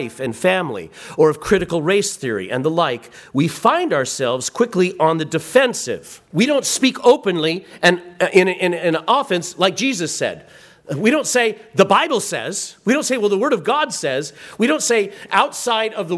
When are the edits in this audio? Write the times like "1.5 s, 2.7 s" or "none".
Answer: 6.3 s